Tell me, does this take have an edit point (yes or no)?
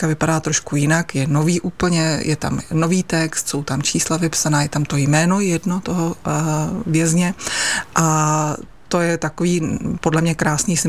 no